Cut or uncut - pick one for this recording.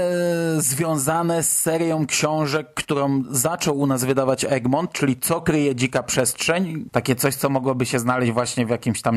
cut